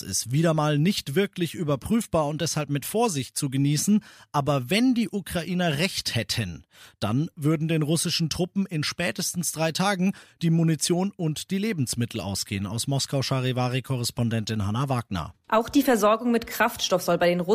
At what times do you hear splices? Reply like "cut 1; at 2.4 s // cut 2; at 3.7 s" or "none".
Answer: none